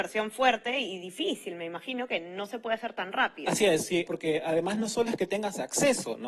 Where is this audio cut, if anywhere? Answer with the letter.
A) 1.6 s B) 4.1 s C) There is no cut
B